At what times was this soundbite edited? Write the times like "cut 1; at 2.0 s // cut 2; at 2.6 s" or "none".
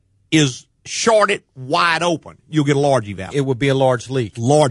cut 1; at 3.3 s